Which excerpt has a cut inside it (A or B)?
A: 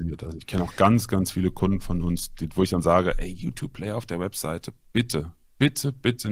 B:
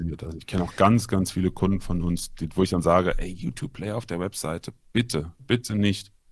B